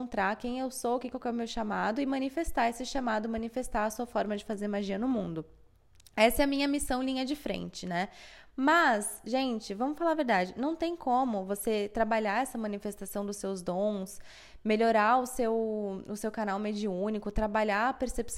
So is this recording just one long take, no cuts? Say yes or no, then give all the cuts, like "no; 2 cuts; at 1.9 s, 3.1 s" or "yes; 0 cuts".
no; 1 cut; at 1.1 s